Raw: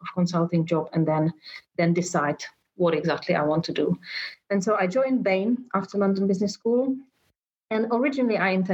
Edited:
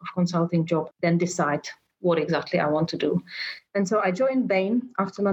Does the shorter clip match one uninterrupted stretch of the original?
no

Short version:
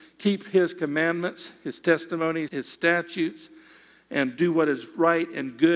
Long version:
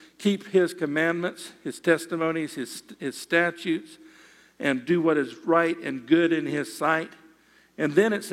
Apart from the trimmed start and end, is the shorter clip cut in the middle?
yes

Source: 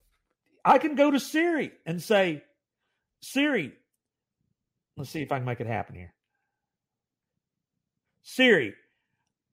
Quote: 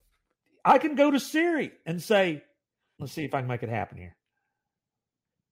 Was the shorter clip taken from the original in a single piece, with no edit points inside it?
no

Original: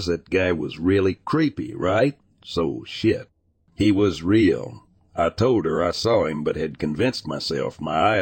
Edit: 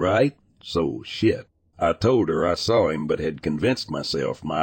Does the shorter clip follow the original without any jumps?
no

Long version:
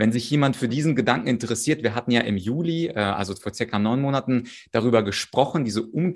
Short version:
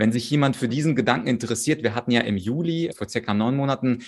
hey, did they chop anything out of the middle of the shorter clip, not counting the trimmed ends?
yes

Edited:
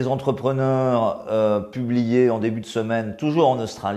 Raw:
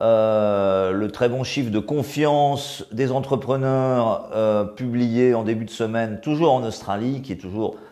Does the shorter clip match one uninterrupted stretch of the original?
yes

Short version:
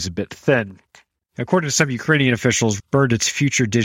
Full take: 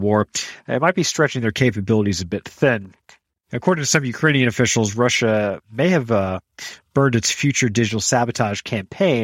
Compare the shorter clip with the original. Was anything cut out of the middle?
yes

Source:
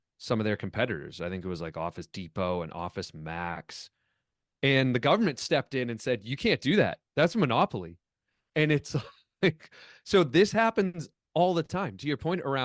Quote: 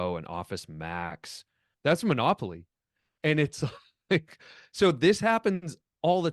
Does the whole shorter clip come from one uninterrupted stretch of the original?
no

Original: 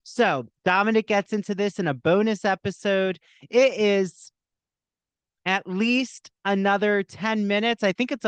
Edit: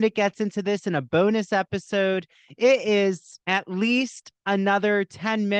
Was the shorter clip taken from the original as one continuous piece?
no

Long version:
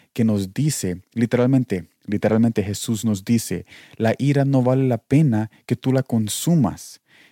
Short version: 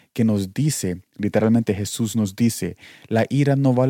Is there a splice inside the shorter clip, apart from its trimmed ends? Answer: yes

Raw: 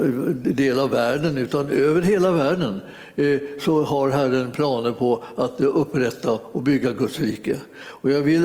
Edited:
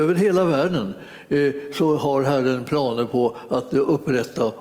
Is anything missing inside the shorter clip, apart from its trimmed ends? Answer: no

